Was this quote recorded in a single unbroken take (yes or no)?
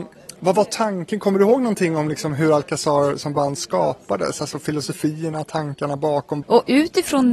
no